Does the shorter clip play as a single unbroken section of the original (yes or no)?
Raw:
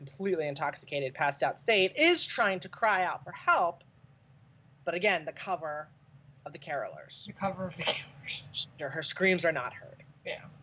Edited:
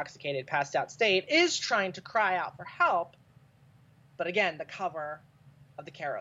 yes